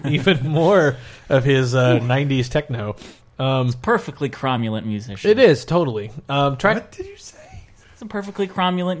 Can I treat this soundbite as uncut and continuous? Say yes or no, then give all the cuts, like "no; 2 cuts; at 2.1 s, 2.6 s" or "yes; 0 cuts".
yes; 0 cuts